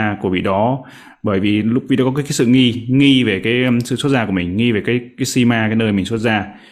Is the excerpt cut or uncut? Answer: uncut